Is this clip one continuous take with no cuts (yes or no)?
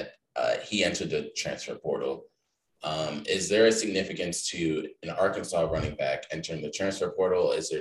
yes